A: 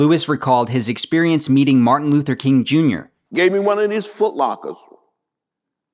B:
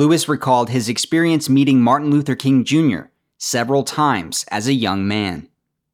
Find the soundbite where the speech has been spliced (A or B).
A